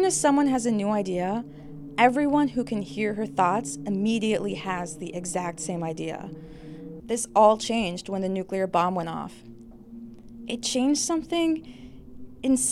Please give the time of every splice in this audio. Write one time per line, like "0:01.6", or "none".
0:07.0

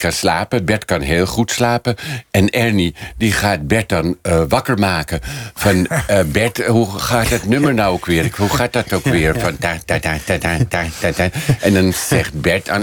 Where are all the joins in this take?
none

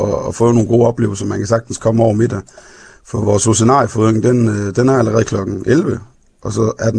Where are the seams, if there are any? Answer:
none

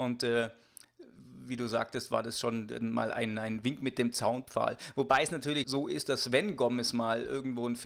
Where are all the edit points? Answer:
0:05.6

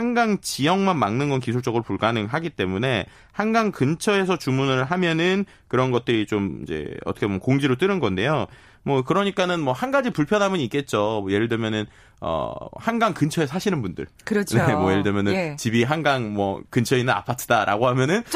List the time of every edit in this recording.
none

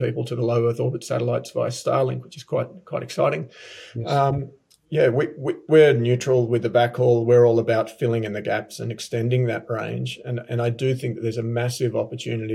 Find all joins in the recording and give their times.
none

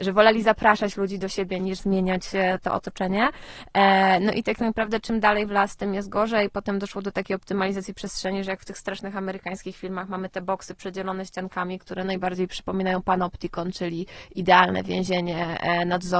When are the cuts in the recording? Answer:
0:01.6

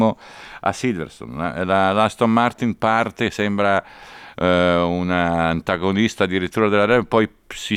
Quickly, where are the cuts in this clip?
none

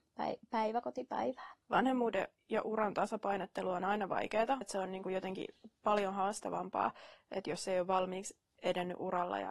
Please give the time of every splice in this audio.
0:01.6
0:04.6

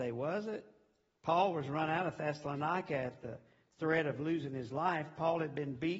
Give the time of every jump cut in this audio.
none

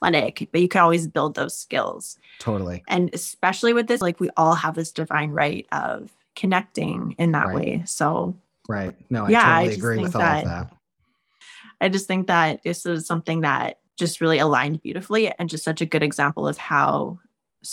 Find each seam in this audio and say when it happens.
0:04.0
0:11.4
0:13.9

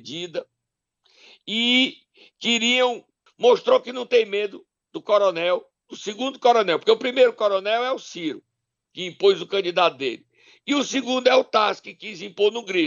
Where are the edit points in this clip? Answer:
0:03.3

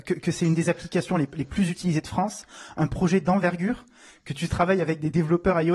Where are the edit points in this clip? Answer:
none

